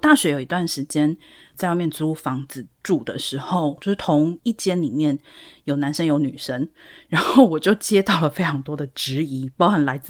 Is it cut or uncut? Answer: cut